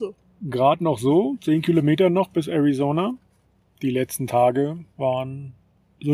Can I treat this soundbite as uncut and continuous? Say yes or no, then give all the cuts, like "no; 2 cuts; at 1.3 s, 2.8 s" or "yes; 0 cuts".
yes; 0 cuts